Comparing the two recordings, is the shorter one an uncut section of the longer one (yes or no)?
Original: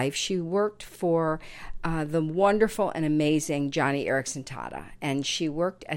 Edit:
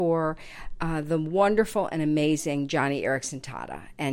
yes